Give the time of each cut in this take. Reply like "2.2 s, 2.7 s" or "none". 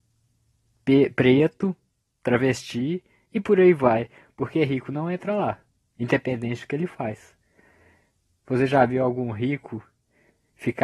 none

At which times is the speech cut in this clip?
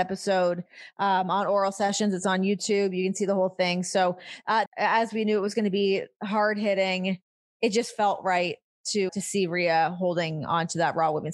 4.7 s, 9.1 s

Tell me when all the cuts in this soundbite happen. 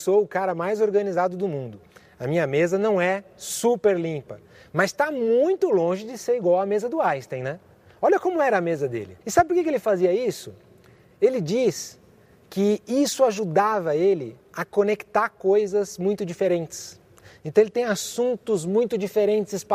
7.9 s, 9.2 s

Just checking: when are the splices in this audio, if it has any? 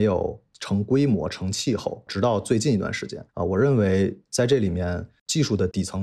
3.3 s

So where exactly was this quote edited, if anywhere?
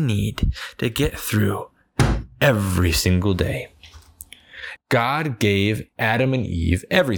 4.8 s

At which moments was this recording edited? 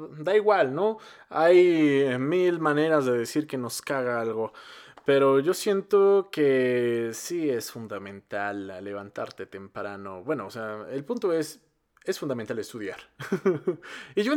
none

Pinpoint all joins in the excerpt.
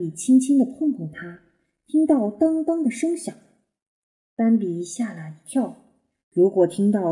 6.2 s

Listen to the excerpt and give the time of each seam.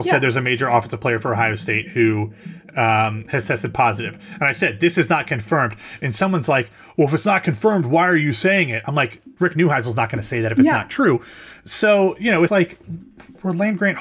9.4 s, 12.5 s

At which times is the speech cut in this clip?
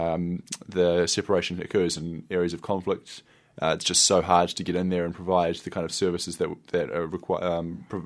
none

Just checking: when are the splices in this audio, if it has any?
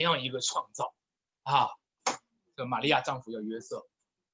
2.0 s

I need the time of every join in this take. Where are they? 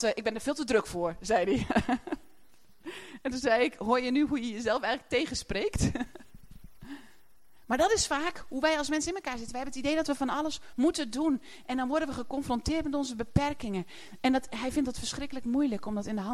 10.7 s

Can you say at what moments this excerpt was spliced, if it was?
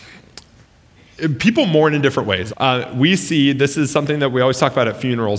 2.5 s

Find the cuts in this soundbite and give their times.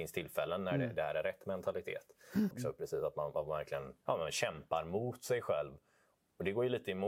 2.5 s, 4.0 s

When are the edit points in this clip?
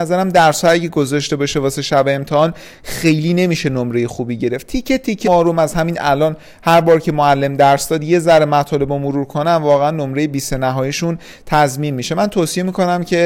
5.2 s

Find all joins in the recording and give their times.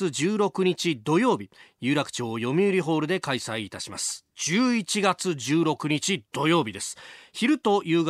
none

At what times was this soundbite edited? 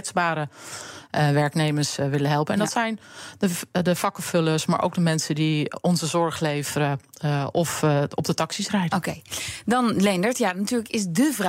none

